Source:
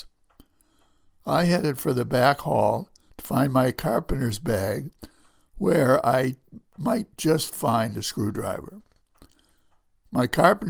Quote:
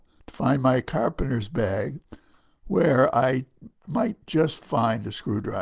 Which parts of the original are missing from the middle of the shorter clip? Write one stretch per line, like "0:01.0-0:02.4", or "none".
none